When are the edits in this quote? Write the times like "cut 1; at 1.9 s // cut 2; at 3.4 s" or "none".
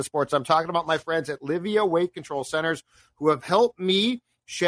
none